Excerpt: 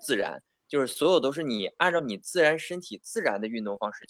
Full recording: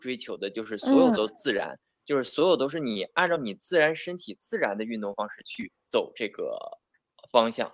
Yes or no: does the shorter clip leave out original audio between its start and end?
no